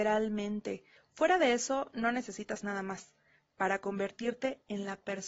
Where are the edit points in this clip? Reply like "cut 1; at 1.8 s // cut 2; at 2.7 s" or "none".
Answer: cut 1; at 1.0 s